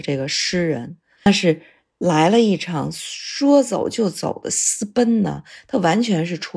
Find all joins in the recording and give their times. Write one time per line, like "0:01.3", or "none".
0:01.2